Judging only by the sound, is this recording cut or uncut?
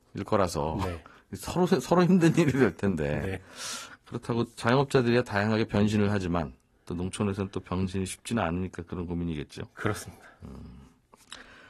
uncut